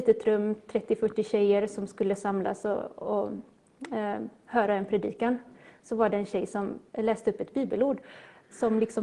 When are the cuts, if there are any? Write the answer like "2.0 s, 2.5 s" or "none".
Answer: none